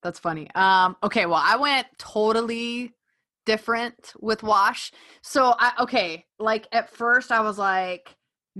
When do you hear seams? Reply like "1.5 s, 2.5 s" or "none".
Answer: none